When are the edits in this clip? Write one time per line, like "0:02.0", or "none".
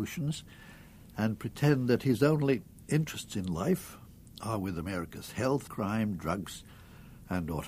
0:05.7